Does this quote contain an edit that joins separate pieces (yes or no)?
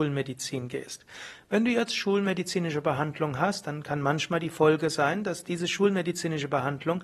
no